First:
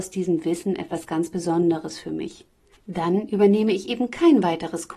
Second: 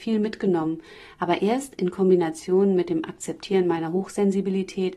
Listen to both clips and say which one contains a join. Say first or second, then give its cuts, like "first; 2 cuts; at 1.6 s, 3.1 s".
first; 1 cut; at 2.7 s